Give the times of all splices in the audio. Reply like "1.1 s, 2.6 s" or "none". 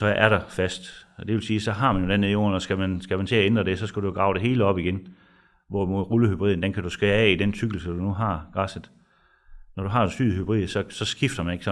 none